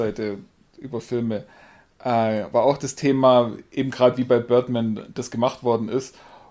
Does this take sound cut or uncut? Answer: uncut